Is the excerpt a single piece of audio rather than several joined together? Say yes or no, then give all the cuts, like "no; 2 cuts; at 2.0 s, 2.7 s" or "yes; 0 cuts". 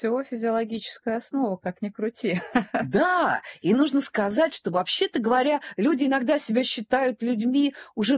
yes; 0 cuts